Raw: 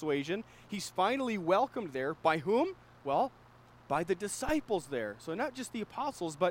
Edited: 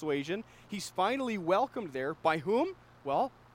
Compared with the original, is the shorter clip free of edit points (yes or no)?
yes